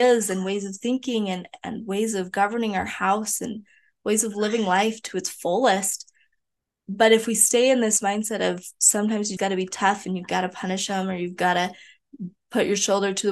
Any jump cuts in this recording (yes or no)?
yes